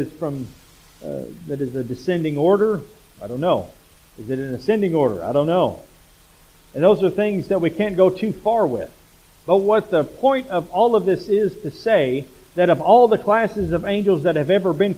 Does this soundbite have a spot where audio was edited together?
no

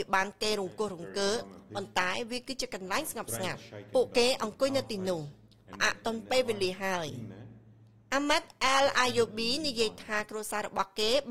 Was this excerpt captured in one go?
yes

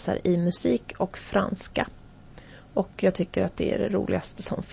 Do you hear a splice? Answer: no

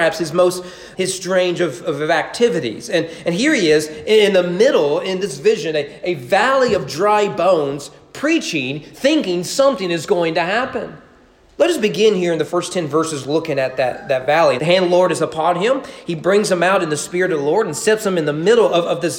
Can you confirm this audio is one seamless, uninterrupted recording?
no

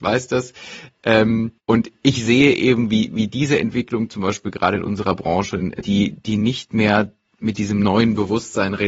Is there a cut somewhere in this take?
yes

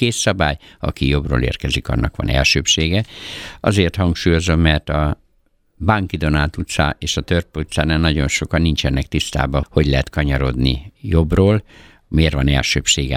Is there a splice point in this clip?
yes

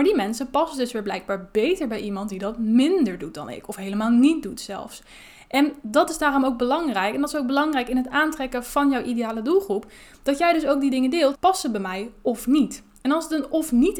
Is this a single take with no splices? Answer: no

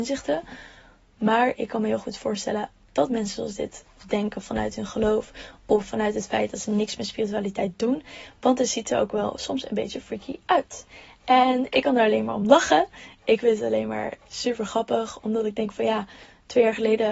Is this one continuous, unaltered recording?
yes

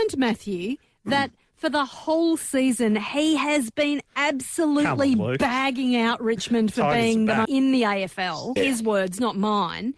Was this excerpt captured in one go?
no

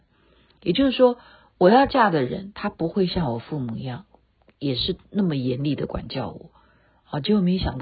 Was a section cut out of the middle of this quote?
no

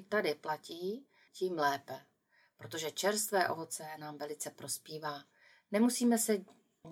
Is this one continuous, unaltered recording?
no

